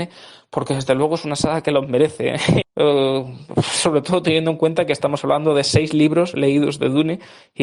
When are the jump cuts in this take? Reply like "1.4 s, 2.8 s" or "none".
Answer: 2.6 s